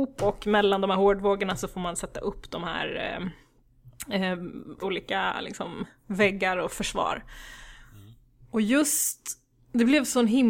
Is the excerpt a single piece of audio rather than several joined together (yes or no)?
no